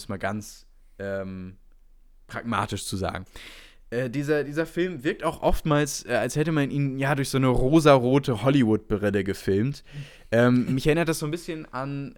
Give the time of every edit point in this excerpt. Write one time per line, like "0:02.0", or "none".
none